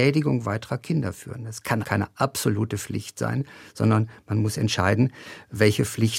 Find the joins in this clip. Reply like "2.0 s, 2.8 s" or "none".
1.8 s